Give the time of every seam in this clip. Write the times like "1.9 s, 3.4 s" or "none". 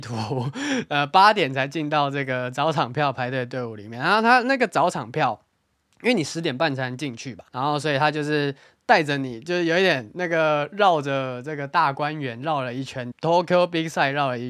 7.5 s, 13.1 s